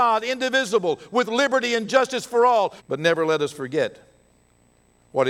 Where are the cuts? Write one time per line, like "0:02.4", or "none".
0:02.8